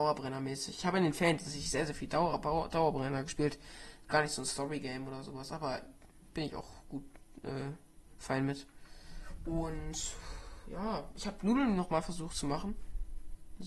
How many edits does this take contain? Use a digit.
1